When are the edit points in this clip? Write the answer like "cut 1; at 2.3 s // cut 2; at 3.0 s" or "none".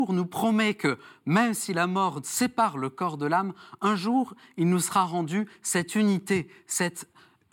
none